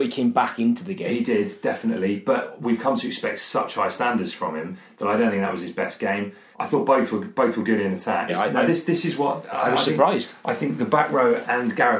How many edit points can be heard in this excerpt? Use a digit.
2